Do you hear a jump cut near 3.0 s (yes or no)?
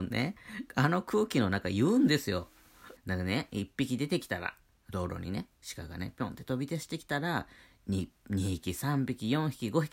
yes